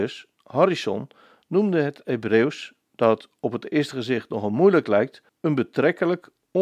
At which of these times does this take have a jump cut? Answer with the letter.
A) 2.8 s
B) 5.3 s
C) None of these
B